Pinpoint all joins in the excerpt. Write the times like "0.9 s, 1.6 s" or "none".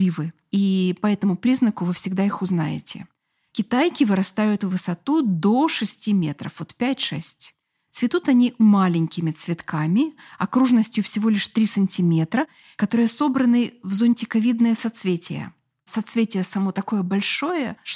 8.6 s